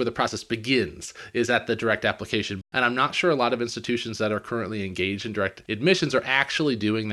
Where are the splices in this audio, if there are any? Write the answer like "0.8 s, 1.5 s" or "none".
2.6 s